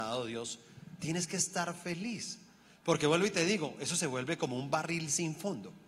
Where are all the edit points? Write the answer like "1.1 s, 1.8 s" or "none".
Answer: none